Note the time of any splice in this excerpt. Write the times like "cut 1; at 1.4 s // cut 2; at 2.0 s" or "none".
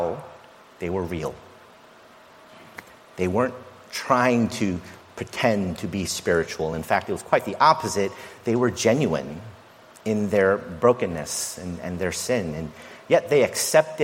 none